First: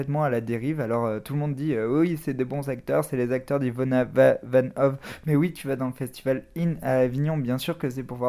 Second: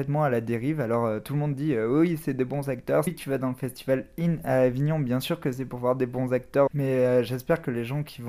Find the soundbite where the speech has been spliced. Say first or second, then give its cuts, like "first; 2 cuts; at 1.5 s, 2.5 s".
second; 2 cuts; at 3.1 s, 6.7 s